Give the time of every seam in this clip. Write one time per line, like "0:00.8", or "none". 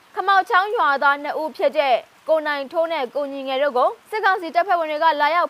0:04.0